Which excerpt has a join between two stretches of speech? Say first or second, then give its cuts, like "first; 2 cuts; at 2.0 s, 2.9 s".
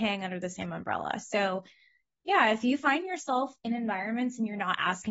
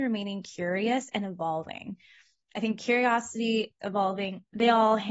second; 1 cut; at 3.8 s